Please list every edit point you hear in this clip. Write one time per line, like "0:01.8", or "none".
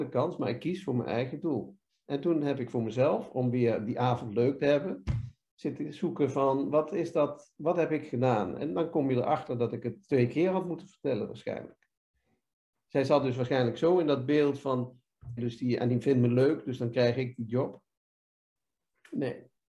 0:15.4